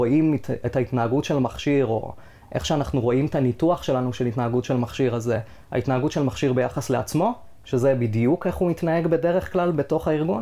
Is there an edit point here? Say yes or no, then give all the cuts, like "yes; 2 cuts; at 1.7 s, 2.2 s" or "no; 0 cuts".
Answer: no; 0 cuts